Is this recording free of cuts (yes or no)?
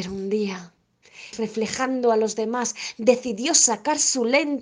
no